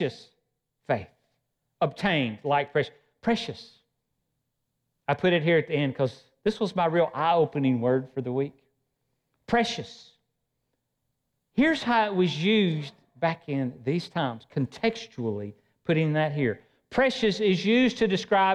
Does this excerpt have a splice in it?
no; 0 cuts

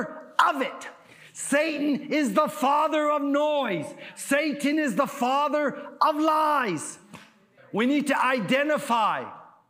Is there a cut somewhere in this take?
yes; 1 cut; at 7.6 s

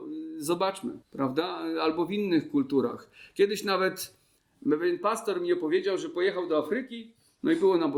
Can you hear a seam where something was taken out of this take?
yes; 1 cut; at 1.0 s

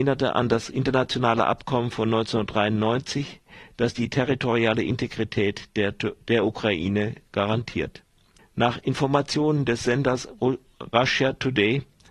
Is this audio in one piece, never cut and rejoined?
yes; 0 cuts

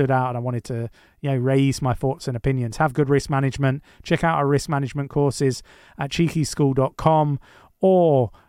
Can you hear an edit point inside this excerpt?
no; 0 cuts

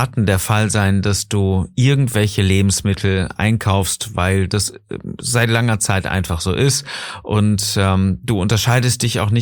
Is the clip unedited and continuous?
no; 1 cut; at 3.4 s

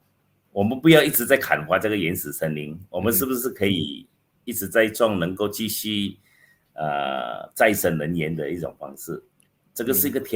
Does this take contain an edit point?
no; 0 cuts

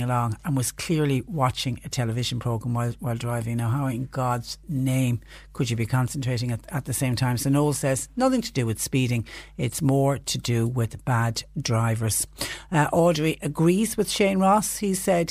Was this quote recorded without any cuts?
yes; 0 cuts

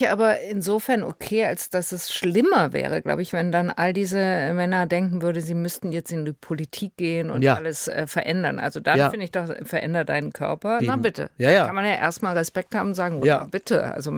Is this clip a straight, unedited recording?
no; 2 cuts; at 10.8 s, 13.2 s

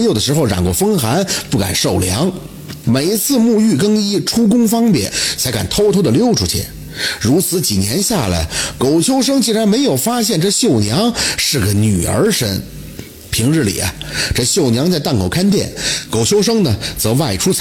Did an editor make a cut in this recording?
yes; 2 cuts; at 2.8 s, 5.4 s

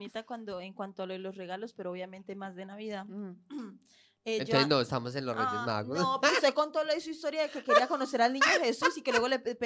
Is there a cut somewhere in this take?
no; 0 cuts

